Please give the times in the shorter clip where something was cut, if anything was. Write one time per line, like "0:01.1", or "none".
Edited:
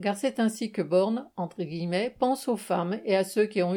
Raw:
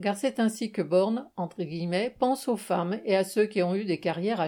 none